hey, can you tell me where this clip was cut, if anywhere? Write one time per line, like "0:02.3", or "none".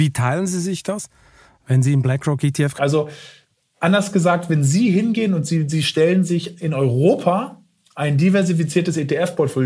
0:02.8